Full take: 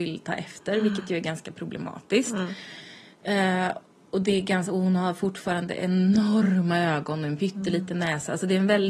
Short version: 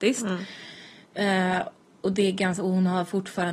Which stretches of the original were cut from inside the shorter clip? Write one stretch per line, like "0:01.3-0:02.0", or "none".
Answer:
none